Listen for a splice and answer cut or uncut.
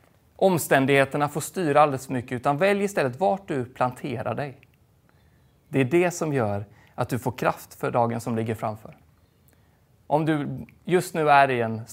uncut